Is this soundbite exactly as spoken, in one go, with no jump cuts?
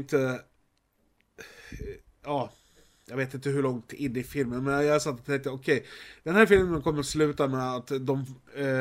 yes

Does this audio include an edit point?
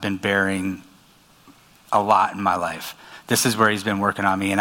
no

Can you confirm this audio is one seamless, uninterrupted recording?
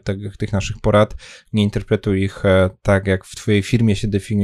yes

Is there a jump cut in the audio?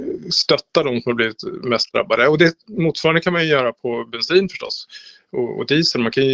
no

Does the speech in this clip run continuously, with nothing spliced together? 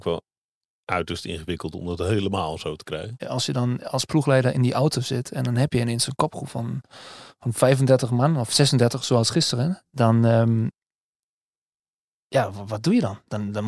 no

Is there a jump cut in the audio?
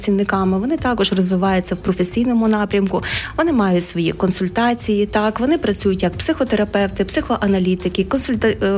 no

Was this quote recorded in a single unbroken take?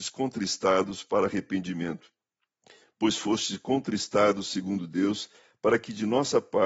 yes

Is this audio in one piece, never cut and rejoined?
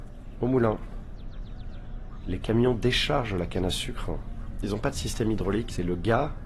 yes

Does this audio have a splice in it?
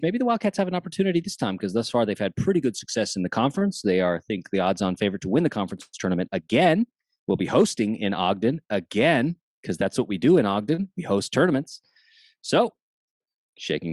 no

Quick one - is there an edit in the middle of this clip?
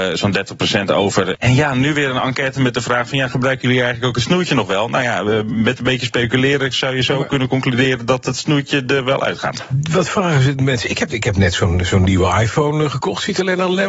yes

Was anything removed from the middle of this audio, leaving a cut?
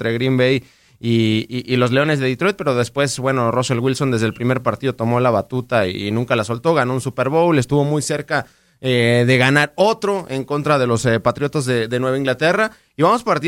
no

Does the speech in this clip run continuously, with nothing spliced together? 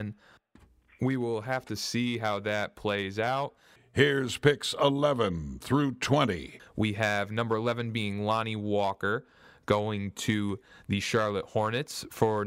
no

